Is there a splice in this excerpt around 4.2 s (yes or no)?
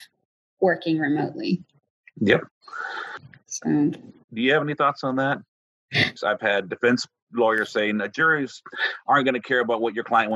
yes